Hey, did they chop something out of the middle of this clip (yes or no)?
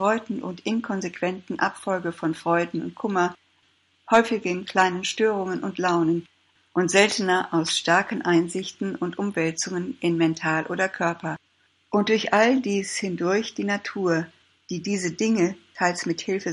no